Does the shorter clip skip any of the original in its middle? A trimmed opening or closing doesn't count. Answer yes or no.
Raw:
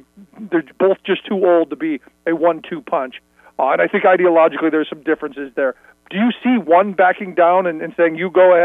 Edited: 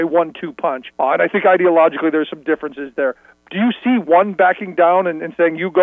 yes